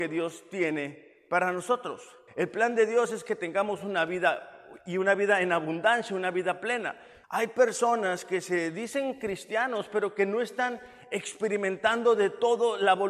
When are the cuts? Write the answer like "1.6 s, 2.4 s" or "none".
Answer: 2.3 s, 7.2 s

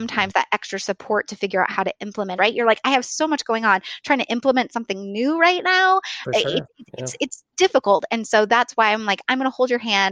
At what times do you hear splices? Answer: 2.4 s

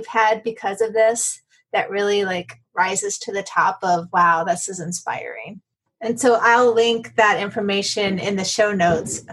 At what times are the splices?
5.9 s

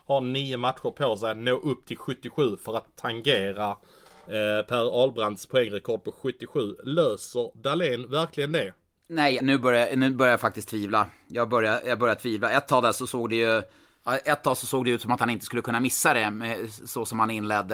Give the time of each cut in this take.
9.4 s

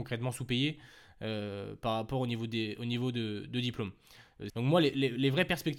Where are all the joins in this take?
4.5 s

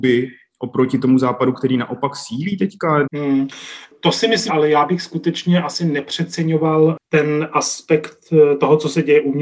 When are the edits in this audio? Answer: 3.0 s, 4.5 s

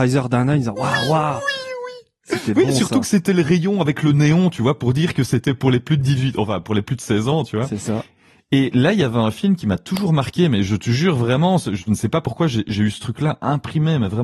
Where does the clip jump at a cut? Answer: none

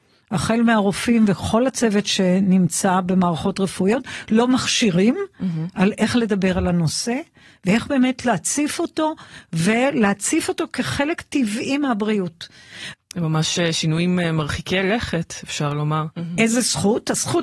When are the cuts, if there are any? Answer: 12.9 s, 16.1 s

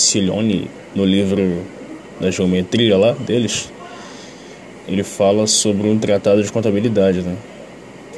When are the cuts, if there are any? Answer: 4.8 s

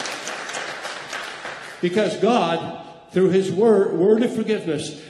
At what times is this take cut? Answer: none

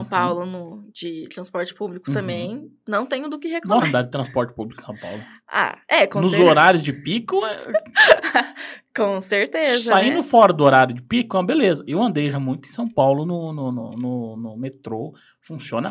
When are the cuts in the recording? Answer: 3.8 s

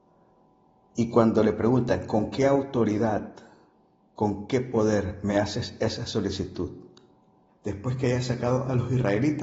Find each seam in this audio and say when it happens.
7.5 s

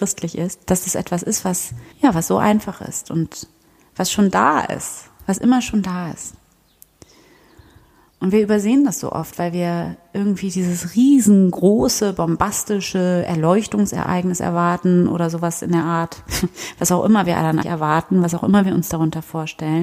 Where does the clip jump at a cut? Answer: 1.9 s, 17.6 s

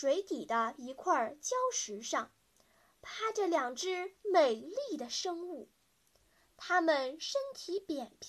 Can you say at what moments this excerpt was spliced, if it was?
none

